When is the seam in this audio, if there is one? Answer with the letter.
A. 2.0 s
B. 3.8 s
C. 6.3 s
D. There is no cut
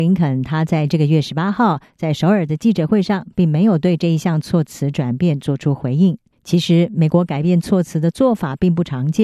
C